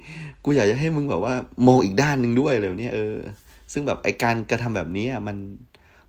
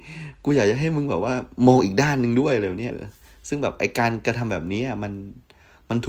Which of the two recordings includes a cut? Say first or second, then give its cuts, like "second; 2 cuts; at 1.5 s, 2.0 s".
second; 1 cut; at 2.9 s